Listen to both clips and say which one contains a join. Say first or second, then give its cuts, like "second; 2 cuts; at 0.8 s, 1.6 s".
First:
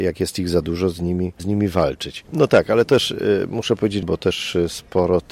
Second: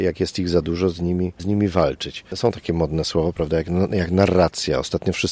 first; 2 cuts; at 2.3 s, 4.0 s